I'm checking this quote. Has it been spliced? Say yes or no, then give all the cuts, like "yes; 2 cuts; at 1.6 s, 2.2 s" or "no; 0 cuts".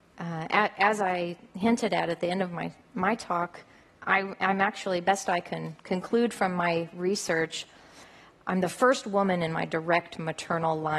no; 0 cuts